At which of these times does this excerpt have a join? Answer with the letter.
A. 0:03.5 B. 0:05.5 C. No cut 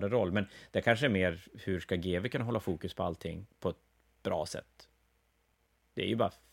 A